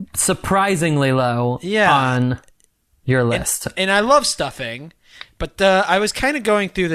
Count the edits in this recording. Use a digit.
0